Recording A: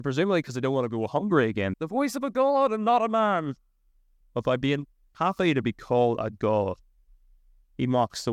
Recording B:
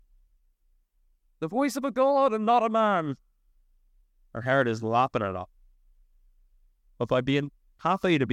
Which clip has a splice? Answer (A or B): A